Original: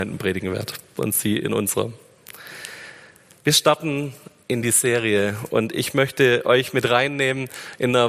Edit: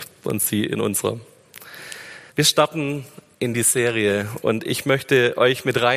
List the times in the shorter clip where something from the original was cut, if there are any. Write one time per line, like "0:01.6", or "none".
0:02.3